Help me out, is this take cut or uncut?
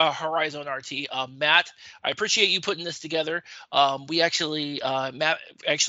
uncut